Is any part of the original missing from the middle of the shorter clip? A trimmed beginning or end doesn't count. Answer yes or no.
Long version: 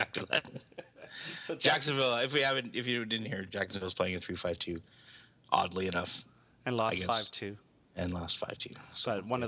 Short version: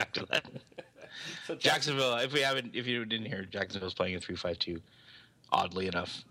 no